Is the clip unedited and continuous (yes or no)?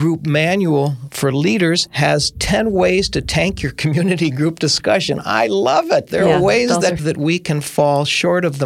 no